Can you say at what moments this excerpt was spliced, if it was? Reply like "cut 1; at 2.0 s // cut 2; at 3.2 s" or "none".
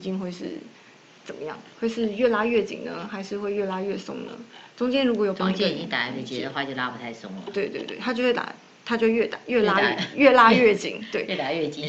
none